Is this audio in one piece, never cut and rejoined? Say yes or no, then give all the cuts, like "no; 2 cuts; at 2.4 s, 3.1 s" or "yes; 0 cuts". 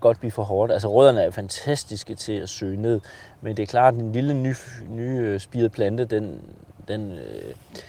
yes; 0 cuts